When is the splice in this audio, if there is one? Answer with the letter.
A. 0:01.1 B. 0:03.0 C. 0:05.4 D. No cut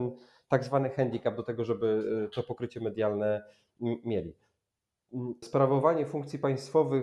C